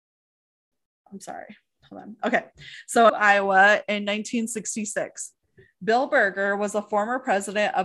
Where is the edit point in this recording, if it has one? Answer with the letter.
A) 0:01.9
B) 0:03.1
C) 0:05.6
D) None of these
B